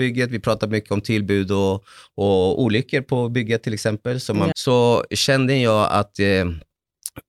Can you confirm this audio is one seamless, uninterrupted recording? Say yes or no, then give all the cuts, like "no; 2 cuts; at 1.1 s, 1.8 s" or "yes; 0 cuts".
no; 1 cut; at 4.5 s